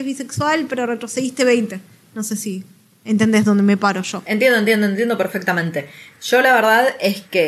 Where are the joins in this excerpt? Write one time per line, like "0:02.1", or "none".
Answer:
none

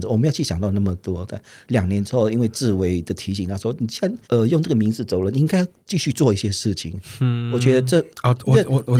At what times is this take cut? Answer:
0:04.2

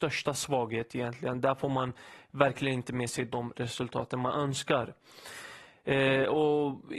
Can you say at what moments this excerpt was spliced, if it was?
0:05.8

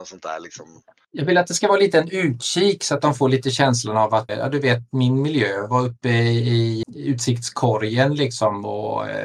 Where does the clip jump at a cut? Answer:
0:04.3
0:06.8

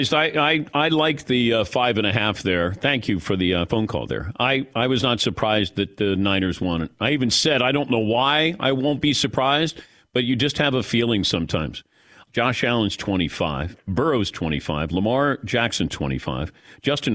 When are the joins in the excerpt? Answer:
0:12.3

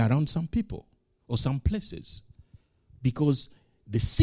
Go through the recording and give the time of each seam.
0:03.0

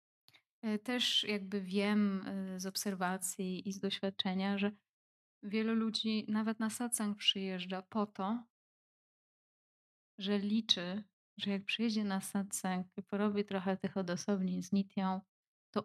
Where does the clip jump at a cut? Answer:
none

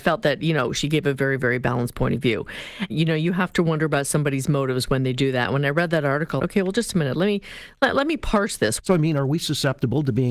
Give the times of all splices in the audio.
0:02.9
0:06.4
0:08.8

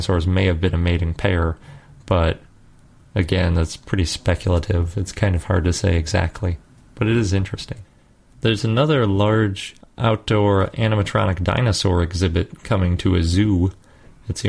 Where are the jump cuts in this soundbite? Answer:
none

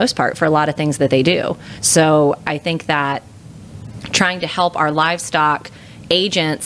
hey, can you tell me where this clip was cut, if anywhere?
none

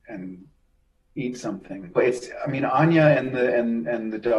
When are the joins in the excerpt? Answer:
0:01.9

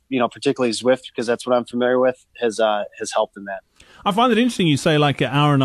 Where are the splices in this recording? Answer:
none

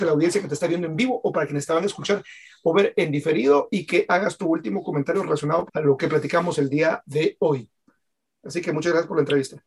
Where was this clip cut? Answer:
0:05.7

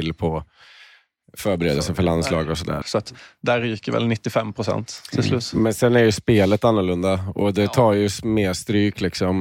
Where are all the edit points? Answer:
0:02.8

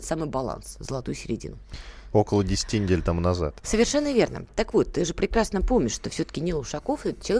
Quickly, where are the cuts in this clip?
0:02.1

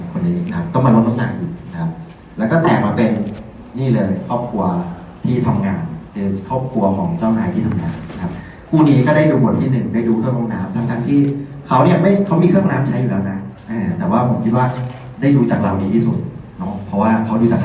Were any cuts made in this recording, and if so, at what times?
none

